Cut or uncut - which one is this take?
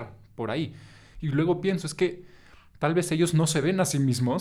uncut